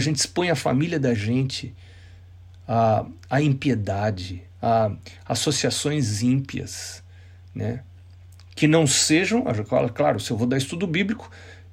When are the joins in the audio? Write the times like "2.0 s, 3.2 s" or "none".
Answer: none